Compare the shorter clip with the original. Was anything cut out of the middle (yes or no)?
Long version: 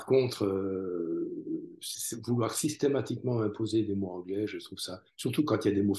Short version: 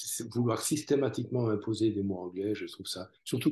no